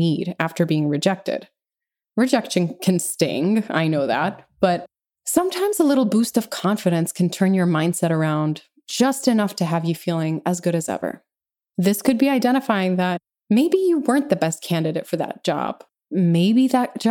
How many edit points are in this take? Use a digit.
0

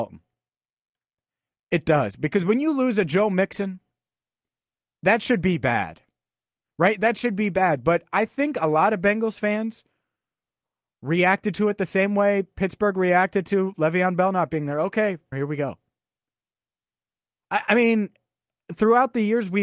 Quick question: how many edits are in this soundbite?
1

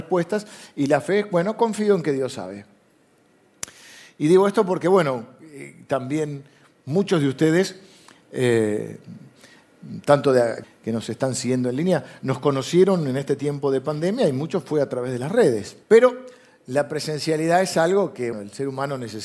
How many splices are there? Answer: 3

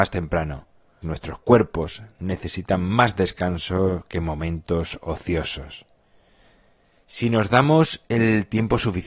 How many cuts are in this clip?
1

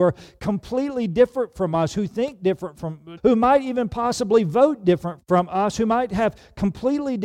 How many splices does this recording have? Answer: 2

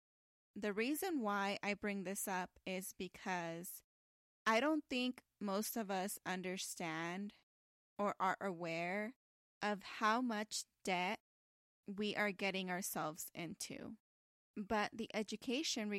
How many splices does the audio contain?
1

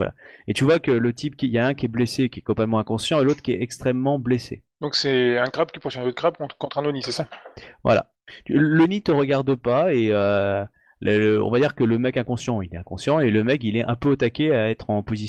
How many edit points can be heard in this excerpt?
0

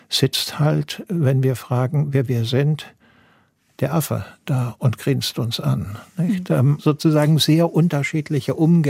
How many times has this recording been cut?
1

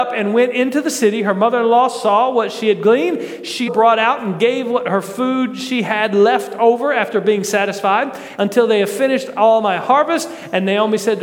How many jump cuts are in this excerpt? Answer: 2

